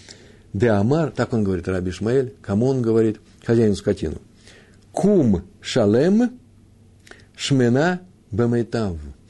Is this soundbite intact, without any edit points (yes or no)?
yes